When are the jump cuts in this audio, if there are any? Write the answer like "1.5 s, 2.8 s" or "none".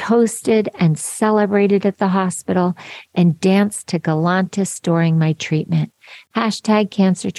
6.3 s